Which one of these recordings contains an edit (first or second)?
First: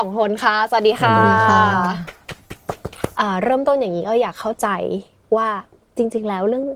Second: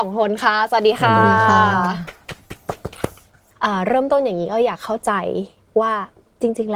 first